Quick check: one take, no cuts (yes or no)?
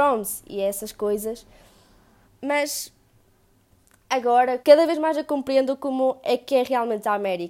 no